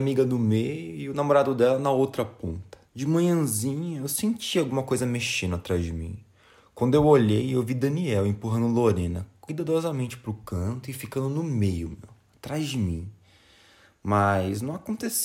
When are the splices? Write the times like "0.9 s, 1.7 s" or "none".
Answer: 2.9 s